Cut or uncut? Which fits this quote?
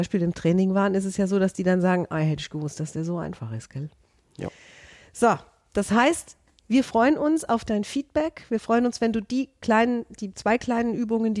uncut